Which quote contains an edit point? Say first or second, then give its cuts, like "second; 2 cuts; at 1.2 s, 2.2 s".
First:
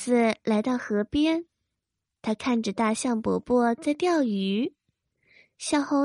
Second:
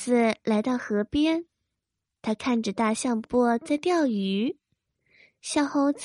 second; 1 cut; at 3.2 s